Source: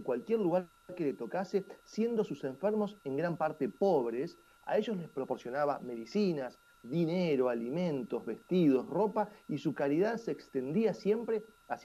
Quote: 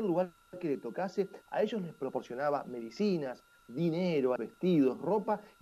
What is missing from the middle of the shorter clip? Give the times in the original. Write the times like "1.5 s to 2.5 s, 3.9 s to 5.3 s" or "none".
1.8 s to 4.6 s, 7.5 s to 8.2 s